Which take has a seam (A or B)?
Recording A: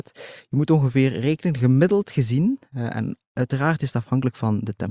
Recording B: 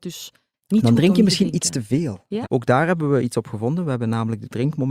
B